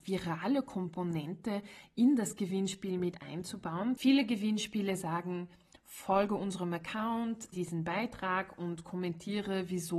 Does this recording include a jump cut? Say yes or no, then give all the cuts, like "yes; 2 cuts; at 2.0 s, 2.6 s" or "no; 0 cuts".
yes; 1 cut; at 7.5 s